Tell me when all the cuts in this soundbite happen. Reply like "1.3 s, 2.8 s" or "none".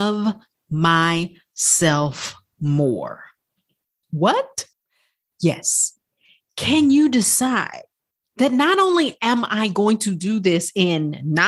none